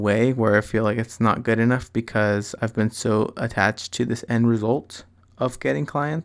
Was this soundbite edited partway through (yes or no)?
no